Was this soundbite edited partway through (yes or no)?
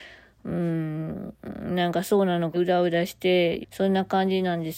yes